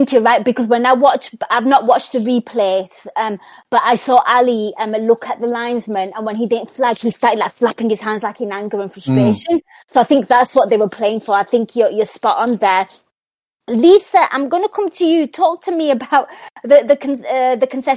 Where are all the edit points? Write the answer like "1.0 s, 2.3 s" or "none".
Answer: none